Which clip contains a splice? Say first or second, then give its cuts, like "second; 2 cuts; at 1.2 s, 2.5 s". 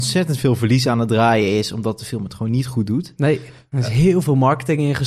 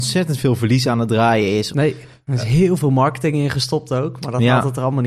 second; 1 cut; at 1.7 s